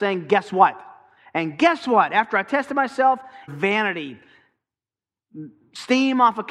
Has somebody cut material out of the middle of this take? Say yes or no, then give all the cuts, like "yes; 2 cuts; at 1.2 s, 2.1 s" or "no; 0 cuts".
yes; 1 cut; at 3.5 s